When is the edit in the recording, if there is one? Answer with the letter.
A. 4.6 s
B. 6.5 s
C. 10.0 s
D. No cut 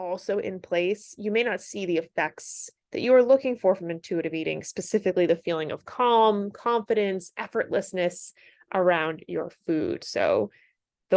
D